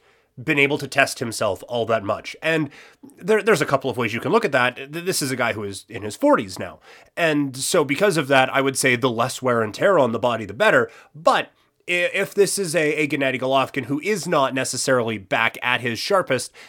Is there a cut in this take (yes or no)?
no